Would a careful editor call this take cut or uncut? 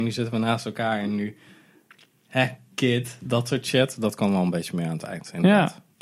uncut